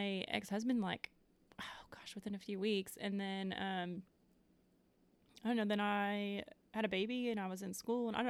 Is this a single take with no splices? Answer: yes; 0 cuts

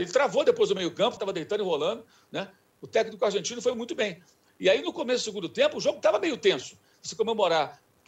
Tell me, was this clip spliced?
yes; 2 cuts; at 1.2 s, 6.9 s

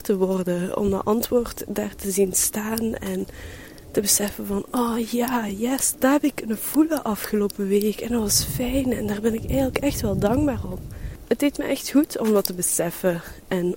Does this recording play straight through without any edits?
yes; 0 cuts

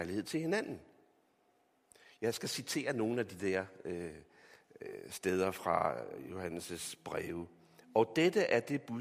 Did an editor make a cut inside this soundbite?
no; 0 cuts

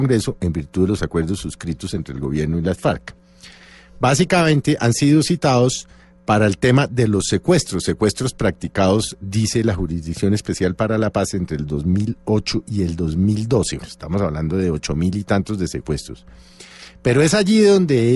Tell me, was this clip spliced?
yes; 1 cut; at 13.8 s

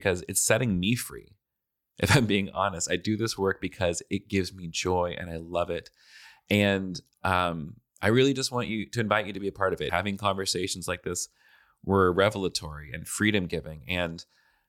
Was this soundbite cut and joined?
yes; 1 cut; at 9.9 s

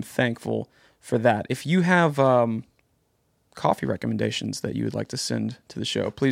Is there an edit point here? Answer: no; 0 cuts

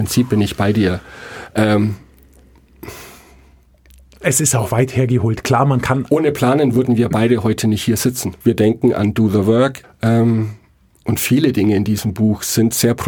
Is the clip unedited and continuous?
no; 2 cuts; at 8.4 s, 9.8 s

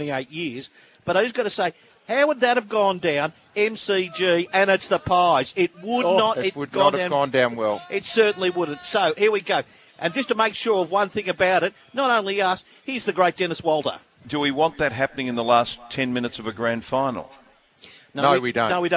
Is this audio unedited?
yes; 0 cuts

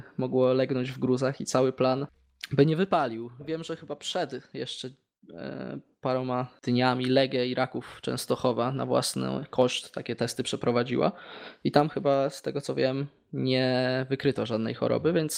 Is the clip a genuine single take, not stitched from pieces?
yes; 0 cuts

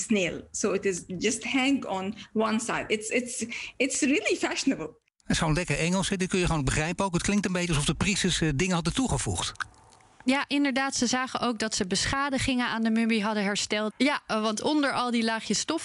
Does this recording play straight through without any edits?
no; 1 cut; at 13.9 s

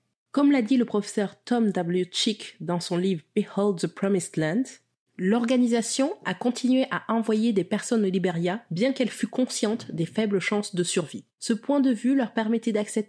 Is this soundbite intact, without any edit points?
no; 1 cut; at 11.3 s

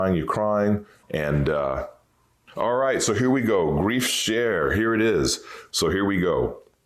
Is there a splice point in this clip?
yes; 2 cuts; at 1.0 s, 5.7 s

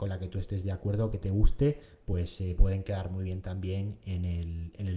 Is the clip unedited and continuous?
yes; 0 cuts

